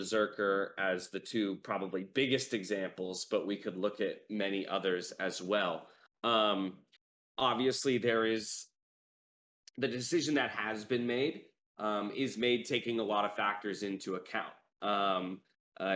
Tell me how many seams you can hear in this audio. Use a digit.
0